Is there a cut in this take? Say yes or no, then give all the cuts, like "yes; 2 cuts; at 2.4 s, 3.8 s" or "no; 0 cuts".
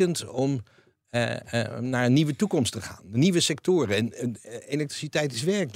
no; 0 cuts